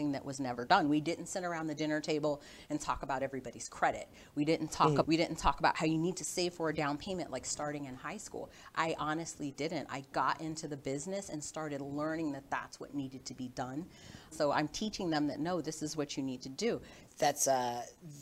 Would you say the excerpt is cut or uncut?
cut